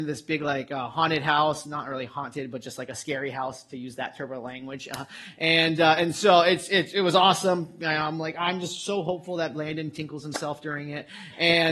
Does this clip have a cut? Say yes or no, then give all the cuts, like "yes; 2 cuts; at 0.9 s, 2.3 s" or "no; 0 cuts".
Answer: no; 0 cuts